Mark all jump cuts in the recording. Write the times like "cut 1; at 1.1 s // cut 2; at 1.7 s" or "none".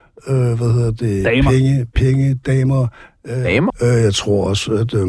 cut 1; at 3.7 s